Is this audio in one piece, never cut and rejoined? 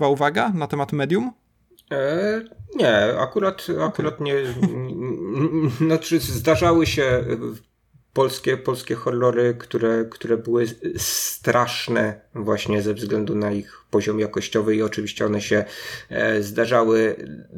yes; 0 cuts

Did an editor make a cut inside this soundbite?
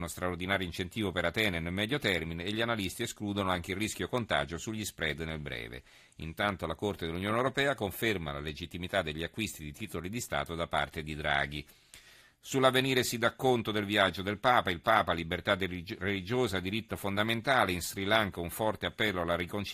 no; 0 cuts

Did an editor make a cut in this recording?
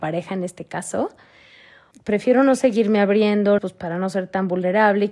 yes; 2 cuts; at 1.9 s, 3.6 s

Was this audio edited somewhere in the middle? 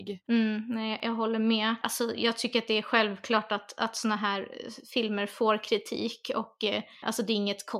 no; 0 cuts

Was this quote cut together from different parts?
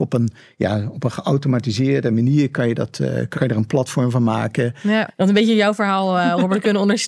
yes; 2 cuts; at 3.3 s, 5.1 s

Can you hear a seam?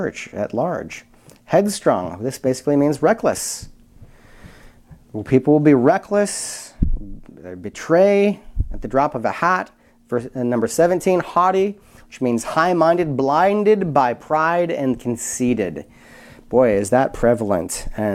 no; 0 cuts

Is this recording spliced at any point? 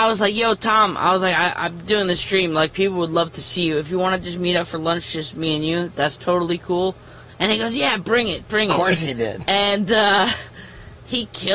yes; 1 cut; at 7.3 s

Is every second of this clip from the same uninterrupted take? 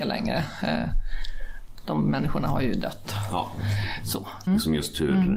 no; 1 cut; at 4.5 s

